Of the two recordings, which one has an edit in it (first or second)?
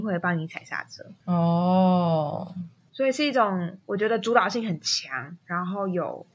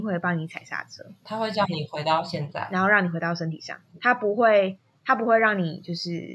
first